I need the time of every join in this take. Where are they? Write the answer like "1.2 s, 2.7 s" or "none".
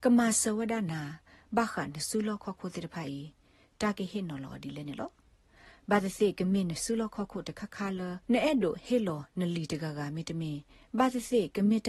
8.2 s

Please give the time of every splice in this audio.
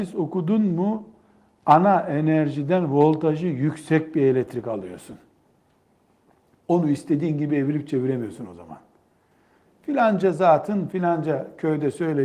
none

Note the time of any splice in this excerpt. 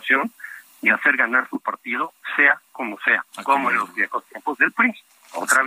none

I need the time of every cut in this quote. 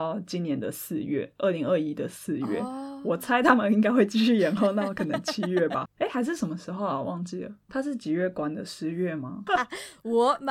5.8 s, 7.7 s, 9.5 s

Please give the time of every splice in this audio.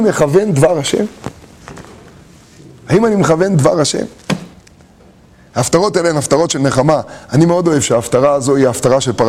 none

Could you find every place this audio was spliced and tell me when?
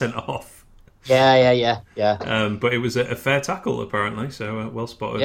none

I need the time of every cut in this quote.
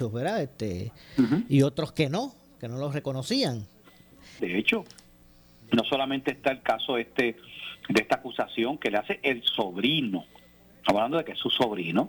4.4 s

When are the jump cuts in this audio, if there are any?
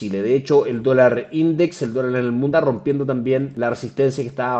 2.5 s

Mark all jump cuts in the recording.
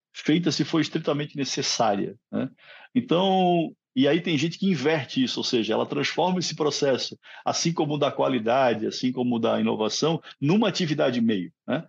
none

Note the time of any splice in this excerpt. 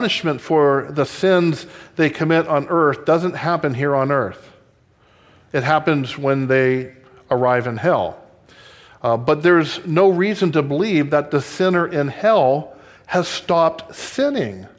none

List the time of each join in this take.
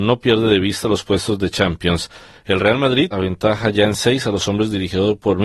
3.1 s

